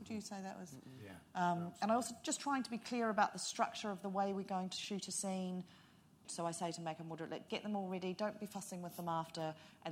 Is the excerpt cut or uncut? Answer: cut